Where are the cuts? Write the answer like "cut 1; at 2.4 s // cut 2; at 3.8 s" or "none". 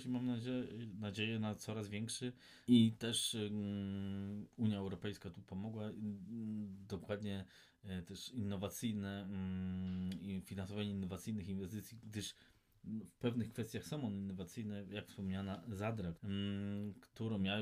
cut 1; at 2.7 s // cut 2; at 16.2 s

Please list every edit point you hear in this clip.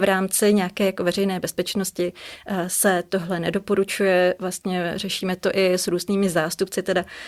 none

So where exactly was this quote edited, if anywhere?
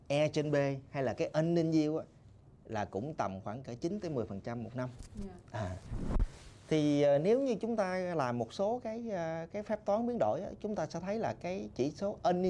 none

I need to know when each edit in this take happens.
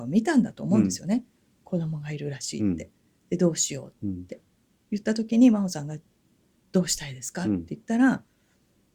none

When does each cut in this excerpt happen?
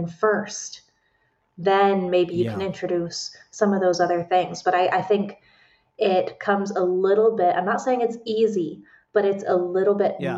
none

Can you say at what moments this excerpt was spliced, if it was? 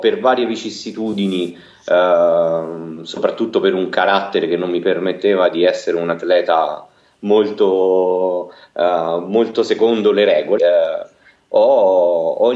cut 1; at 10.6 s

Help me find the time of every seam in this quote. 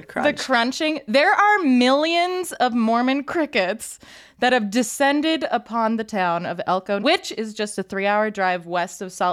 cut 1; at 7.0 s

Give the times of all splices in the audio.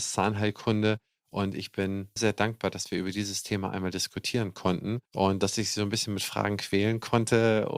cut 1; at 2.2 s // cut 2; at 5.1 s

